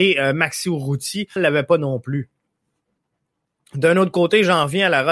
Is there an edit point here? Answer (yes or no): yes